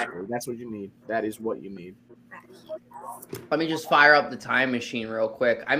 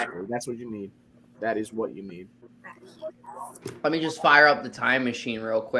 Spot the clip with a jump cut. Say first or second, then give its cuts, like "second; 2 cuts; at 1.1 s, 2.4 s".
first; 1 cut; at 1.0 s